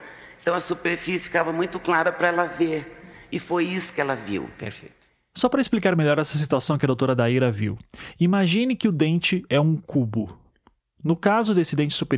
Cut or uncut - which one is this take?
uncut